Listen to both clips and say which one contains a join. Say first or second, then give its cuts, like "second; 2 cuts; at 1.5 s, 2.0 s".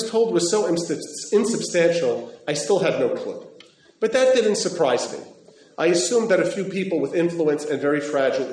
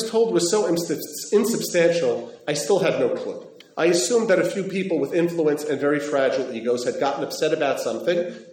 second; 1 cut; at 3.6 s